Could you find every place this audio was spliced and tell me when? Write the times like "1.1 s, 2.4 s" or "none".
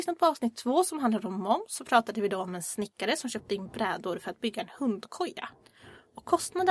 none